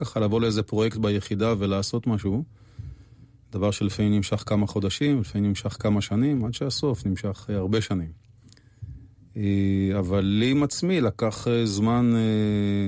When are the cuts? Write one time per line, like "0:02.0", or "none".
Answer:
none